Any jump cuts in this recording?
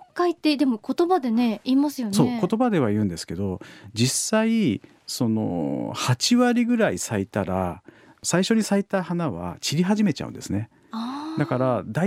no; 0 cuts

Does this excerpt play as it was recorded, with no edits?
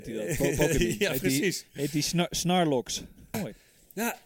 no; 1 cut; at 3.3 s

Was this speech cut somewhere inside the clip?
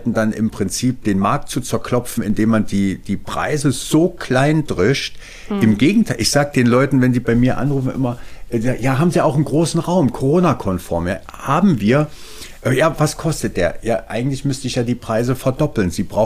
no; 0 cuts

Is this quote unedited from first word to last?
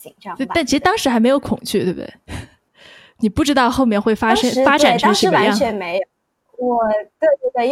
yes; 0 cuts

